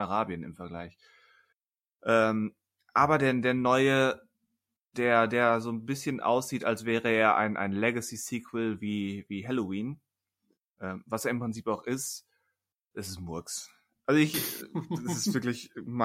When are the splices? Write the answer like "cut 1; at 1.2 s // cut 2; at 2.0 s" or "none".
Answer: none